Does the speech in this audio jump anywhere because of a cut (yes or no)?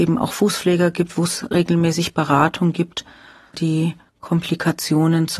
yes